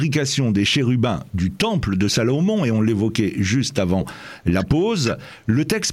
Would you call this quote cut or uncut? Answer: uncut